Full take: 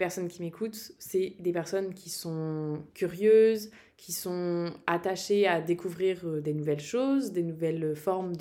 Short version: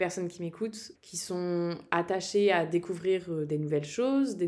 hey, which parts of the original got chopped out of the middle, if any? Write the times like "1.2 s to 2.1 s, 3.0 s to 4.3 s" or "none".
0.9 s to 3.9 s